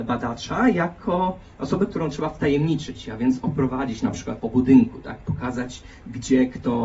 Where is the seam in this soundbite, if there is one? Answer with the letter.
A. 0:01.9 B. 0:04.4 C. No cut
B